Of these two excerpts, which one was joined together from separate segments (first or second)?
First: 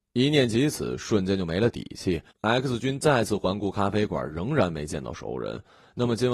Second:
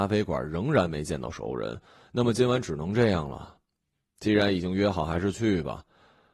first